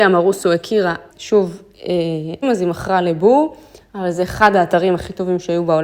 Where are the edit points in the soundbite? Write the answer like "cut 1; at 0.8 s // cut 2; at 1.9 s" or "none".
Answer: cut 1; at 1.1 s // cut 2; at 2.4 s